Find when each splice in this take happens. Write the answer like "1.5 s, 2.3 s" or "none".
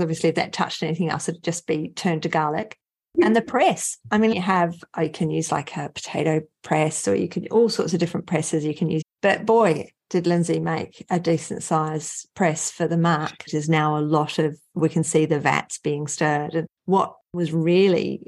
4.3 s, 9.0 s, 13.5 s